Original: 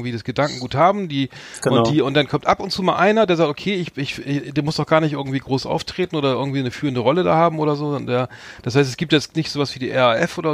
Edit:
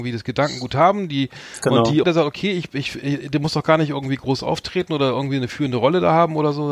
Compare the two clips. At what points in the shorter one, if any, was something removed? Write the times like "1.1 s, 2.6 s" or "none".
2.0 s